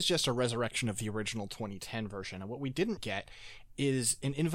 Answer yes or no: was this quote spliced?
yes